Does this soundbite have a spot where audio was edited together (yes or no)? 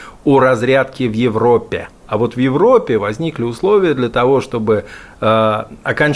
yes